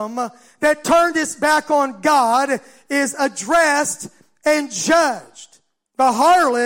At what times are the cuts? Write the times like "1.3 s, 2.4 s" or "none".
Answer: none